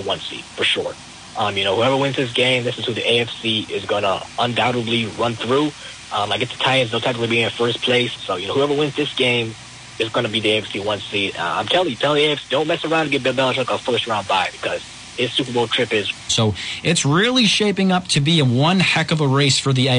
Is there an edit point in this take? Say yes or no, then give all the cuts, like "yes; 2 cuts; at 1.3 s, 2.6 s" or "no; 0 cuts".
yes; 3 cuts; at 8.2 s, 12.0 s, 16.3 s